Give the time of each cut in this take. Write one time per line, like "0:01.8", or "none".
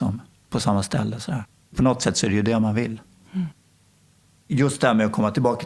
none